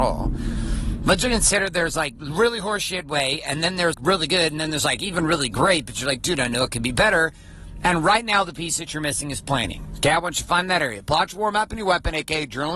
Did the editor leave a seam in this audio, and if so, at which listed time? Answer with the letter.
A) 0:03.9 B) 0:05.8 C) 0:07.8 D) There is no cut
A